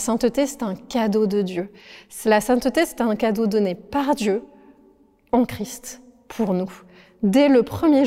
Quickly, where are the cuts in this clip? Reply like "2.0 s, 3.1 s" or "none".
none